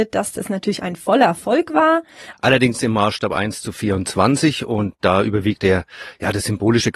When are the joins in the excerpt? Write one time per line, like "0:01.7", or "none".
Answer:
0:02.3
0:05.6